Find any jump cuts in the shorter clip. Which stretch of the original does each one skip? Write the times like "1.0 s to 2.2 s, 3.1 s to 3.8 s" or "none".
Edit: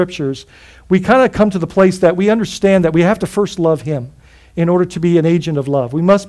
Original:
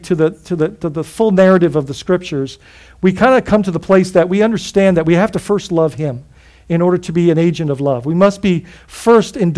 none